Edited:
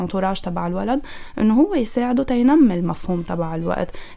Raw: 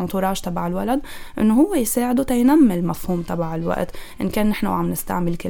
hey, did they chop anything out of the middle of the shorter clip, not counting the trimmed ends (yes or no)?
no